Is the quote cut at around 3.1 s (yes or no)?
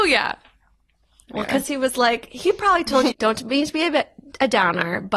yes